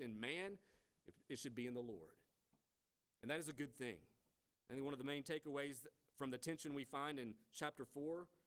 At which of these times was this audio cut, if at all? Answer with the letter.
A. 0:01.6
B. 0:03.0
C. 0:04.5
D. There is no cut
C